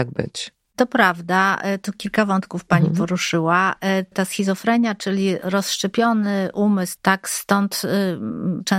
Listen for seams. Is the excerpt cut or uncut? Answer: cut